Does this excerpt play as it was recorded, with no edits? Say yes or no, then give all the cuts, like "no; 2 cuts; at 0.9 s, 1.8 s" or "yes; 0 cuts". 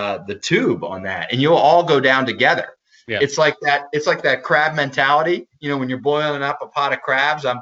yes; 0 cuts